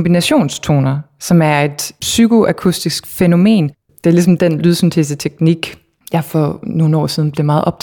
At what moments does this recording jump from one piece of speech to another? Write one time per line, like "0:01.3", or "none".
0:03.9